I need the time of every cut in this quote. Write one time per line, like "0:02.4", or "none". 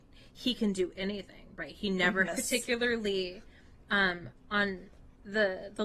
0:02.3